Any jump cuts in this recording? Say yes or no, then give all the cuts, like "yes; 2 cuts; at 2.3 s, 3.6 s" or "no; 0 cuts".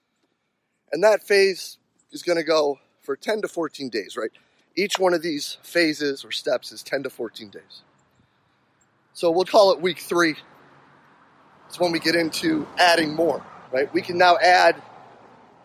yes; 2 cuts; at 9.4 s, 13.6 s